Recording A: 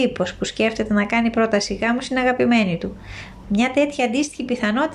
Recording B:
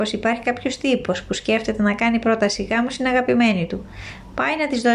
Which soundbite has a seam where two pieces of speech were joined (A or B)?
A